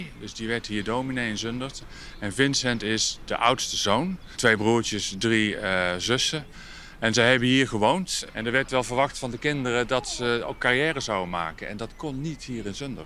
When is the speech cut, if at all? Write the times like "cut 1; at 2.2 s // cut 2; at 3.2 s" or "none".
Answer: none